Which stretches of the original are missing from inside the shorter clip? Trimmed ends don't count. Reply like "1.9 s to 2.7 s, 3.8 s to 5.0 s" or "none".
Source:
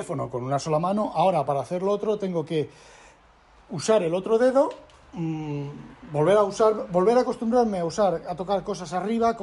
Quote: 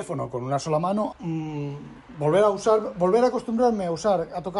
1.1 s to 5.1 s